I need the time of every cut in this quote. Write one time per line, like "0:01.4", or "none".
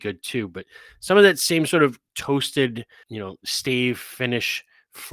0:03.0